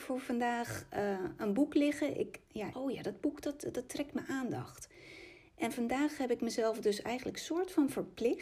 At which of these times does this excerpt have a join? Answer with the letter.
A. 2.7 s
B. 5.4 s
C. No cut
A